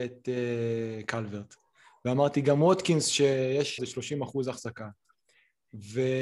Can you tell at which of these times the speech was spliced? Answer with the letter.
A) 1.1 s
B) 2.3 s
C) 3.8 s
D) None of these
C